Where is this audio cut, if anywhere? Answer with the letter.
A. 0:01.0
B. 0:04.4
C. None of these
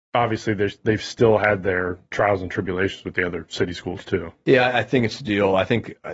C